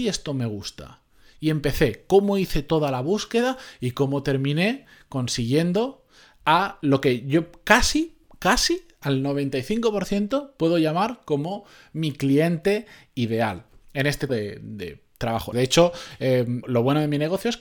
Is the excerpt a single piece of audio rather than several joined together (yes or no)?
no